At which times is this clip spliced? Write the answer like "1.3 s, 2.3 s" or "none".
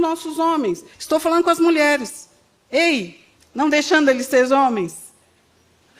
0.9 s, 3.4 s